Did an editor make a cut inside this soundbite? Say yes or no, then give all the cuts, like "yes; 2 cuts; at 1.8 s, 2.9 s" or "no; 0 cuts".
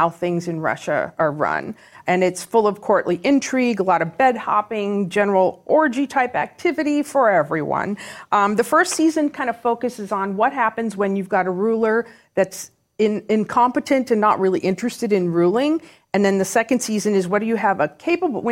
no; 0 cuts